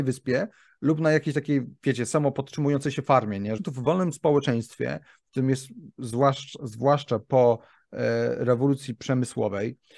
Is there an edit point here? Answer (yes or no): yes